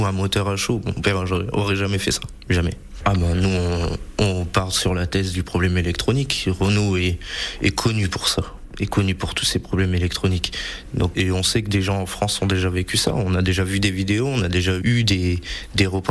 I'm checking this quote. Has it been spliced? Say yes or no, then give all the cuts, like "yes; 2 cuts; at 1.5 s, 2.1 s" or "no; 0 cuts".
yes; 1 cut; at 11.1 s